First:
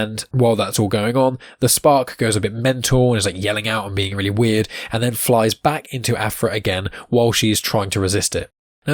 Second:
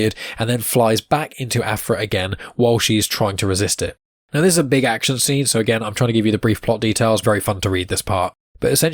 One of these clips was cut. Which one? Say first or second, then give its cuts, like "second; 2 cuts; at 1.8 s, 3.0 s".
second; 1 cut; at 7.2 s